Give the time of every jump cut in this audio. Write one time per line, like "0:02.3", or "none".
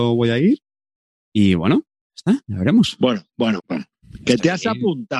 0:03.6